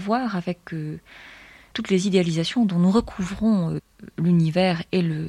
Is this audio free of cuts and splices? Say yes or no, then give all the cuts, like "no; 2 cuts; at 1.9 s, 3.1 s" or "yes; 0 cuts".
no; 1 cut; at 1.7 s